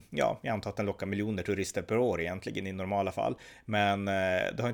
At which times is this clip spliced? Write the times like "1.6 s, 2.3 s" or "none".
none

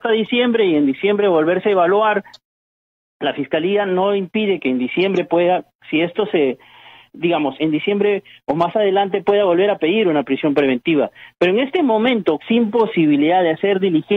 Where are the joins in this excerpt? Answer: 7.5 s, 12.4 s

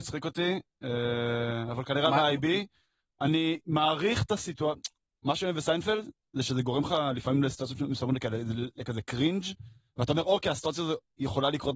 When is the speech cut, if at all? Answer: none

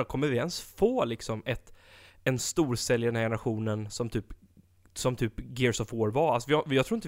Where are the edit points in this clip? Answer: none

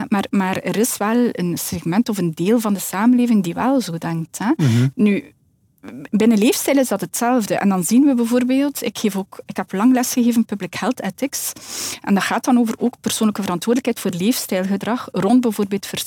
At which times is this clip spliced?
4.9 s

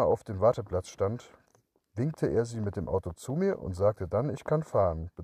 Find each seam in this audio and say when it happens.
none

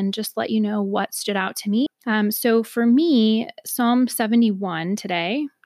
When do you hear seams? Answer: 1.9 s

